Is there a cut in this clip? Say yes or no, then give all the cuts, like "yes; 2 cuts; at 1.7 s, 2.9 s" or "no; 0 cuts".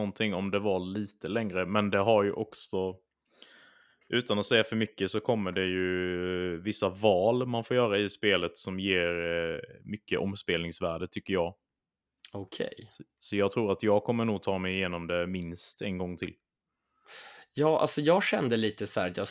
no; 0 cuts